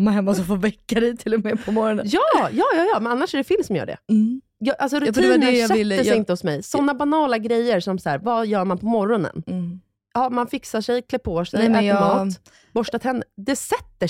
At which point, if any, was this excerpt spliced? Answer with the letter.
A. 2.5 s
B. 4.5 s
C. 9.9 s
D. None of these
D